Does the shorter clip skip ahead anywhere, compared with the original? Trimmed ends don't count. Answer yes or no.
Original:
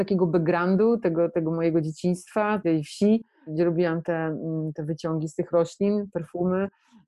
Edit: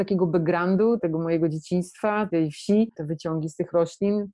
yes